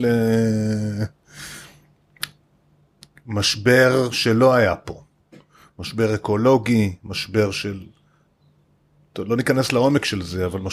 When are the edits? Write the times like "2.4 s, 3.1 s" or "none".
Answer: none